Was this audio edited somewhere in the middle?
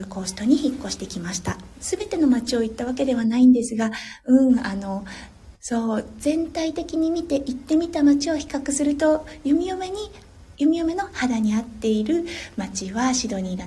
yes; 1 cut; at 1.8 s

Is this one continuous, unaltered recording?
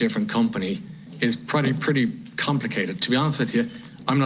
yes; 0 cuts

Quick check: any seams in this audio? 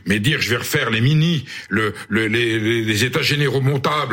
no; 0 cuts

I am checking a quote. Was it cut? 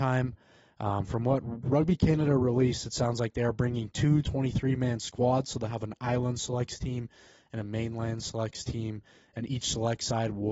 no; 0 cuts

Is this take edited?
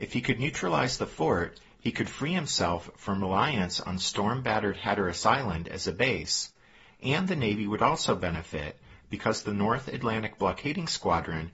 no; 0 cuts

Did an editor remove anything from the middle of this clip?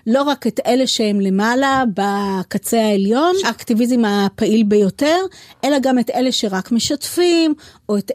yes; 1 cut; at 3.4 s

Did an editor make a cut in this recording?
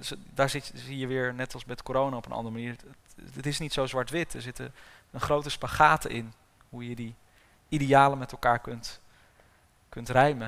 no; 0 cuts

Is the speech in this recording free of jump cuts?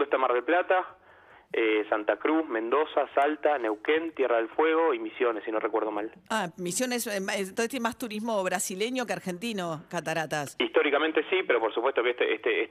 yes; 0 cuts

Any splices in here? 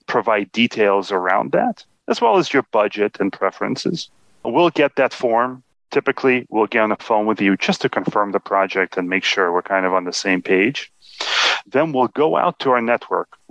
no; 0 cuts

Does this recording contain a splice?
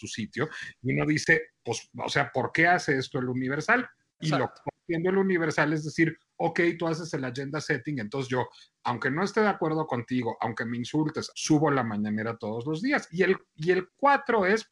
yes; 3 cuts; at 4.2 s, 11.3 s, 13.1 s

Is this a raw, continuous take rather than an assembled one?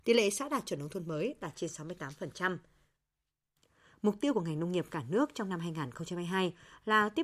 yes; 0 cuts

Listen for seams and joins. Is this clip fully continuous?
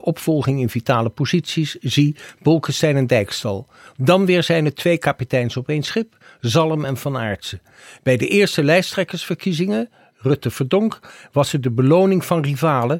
yes; 0 cuts

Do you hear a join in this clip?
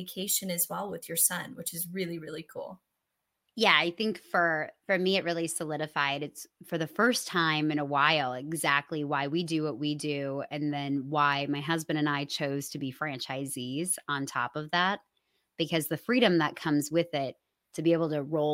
no; 0 cuts

